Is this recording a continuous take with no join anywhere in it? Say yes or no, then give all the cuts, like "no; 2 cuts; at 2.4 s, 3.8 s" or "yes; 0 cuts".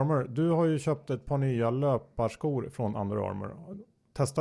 yes; 0 cuts